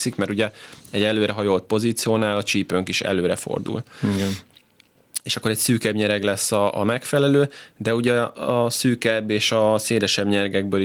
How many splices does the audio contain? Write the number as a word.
zero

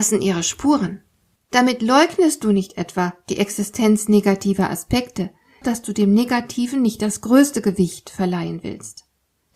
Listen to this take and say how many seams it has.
two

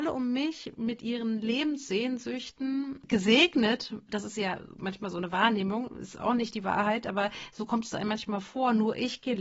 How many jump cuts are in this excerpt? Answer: zero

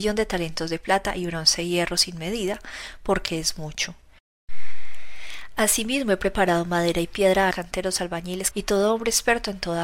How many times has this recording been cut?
two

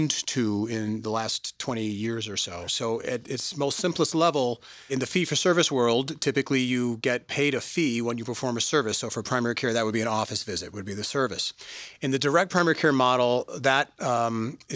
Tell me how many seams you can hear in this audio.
two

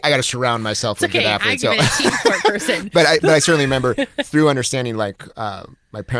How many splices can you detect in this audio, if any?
one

